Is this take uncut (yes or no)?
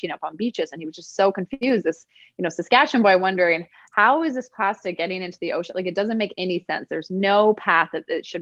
yes